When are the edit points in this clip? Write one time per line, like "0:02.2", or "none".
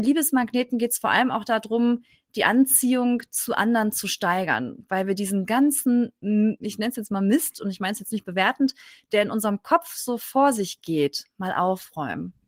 none